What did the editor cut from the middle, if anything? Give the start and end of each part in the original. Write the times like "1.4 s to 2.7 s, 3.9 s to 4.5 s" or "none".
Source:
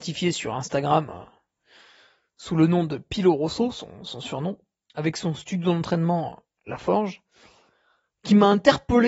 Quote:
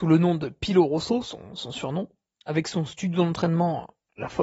none